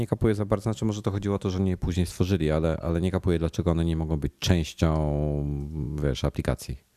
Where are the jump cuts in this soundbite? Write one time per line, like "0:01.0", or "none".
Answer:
0:02.8